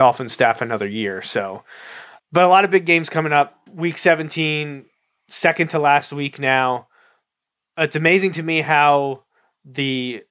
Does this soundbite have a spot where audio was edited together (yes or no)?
yes